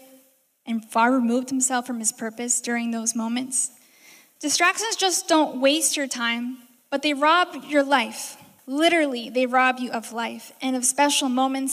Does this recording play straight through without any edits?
no; 2 cuts; at 4.4 s, 8.6 s

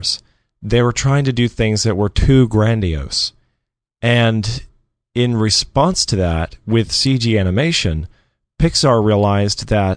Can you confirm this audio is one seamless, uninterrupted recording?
yes; 0 cuts

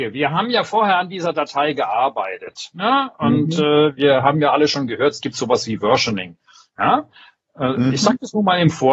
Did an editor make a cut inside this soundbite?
no; 0 cuts

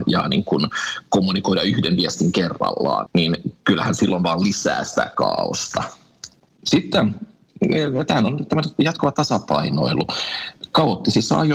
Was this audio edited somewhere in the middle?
yes; 1 cut; at 3.1 s

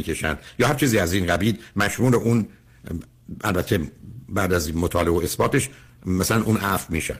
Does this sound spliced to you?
no; 0 cuts

